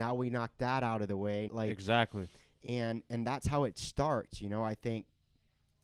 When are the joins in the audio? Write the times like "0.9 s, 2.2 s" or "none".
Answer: 1.5 s